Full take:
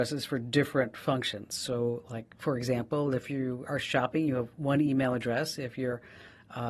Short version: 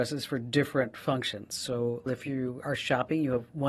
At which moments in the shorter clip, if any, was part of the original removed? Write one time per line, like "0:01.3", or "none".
0:02.1